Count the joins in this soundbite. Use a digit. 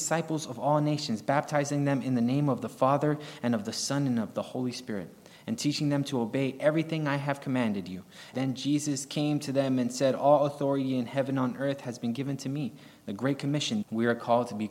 2